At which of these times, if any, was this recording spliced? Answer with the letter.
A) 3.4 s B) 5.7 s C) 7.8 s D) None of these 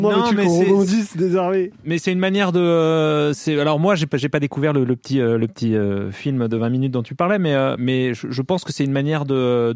C